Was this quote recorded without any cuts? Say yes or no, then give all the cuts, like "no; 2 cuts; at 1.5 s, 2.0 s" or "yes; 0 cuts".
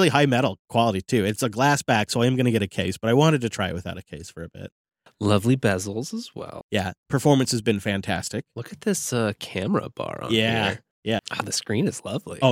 no; 2 cuts; at 6.6 s, 11.2 s